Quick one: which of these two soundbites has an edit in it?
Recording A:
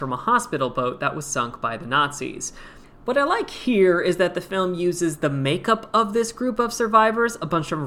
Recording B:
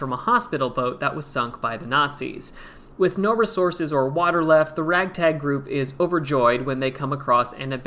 A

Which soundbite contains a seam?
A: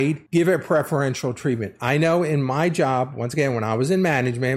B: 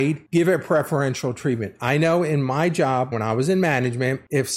B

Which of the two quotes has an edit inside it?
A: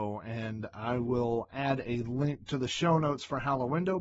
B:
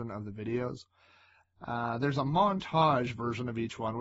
B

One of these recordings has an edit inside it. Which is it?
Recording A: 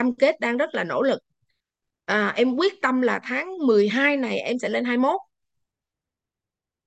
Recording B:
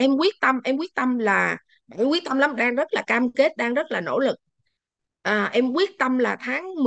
B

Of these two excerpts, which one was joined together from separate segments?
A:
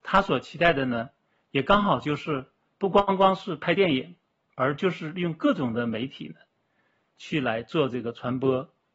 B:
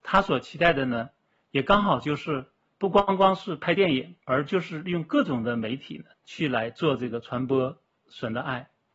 B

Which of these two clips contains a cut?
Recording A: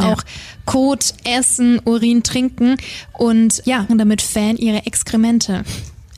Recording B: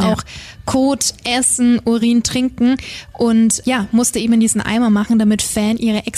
A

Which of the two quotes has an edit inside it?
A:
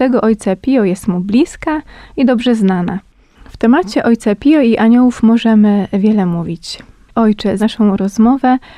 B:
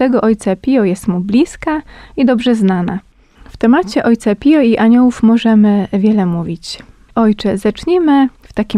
A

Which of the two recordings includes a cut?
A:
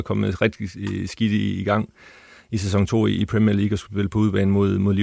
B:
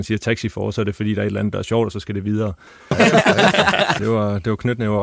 B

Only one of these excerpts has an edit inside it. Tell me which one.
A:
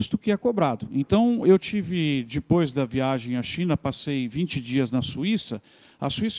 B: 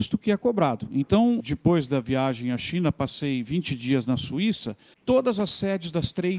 B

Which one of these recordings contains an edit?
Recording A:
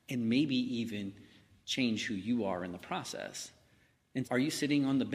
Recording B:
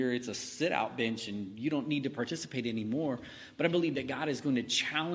A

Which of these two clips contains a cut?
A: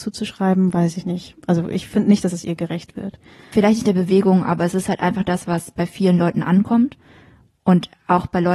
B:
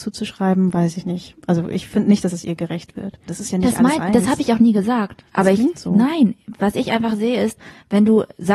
B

